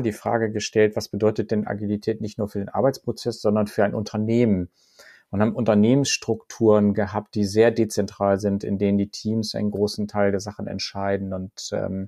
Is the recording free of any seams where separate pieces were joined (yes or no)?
yes